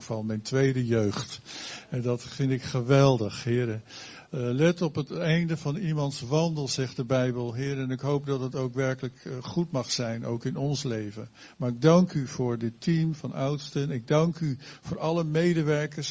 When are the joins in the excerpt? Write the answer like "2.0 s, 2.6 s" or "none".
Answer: none

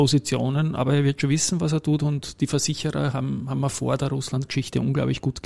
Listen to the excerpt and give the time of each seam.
none

